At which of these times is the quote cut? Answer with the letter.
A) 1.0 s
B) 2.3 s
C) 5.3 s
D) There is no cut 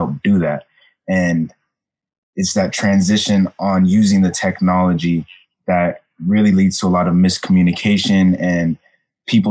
D